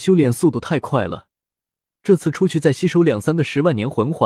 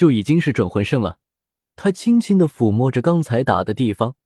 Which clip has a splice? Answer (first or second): second